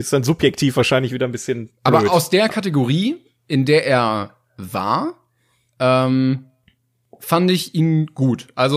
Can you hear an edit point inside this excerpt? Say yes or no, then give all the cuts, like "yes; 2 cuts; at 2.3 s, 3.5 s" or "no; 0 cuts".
no; 0 cuts